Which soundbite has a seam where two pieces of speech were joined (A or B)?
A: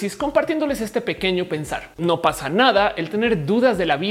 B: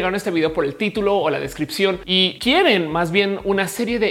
A